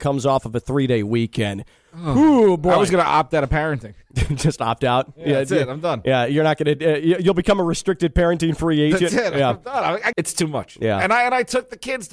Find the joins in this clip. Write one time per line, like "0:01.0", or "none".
0:10.1